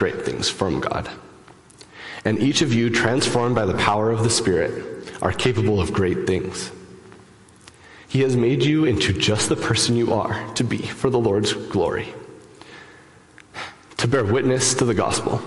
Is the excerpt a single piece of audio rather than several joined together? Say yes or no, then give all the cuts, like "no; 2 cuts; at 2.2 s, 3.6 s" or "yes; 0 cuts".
yes; 0 cuts